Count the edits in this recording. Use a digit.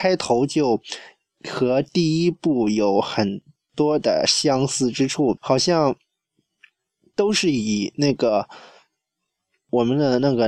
1